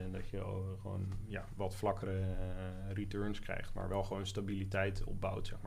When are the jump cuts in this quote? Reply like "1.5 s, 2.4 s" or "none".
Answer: 1.6 s